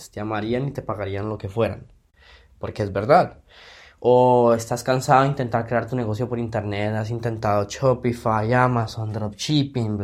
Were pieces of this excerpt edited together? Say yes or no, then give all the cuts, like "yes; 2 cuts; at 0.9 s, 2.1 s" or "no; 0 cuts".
no; 0 cuts